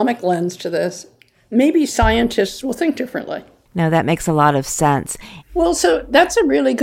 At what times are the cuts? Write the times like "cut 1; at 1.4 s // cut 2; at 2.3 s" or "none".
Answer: cut 1; at 3.7 s // cut 2; at 5.4 s